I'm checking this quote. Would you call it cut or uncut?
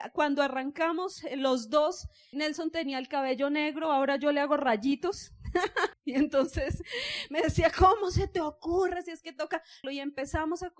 cut